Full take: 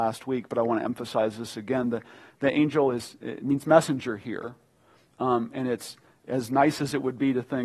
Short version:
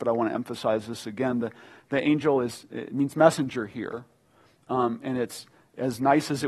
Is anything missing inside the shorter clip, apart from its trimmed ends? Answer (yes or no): no